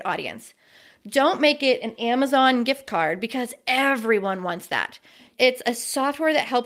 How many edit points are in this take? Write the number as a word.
one